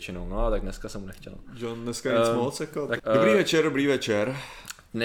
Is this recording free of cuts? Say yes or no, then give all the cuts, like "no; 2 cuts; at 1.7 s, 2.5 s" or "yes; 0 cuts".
no; 1 cut; at 3.0 s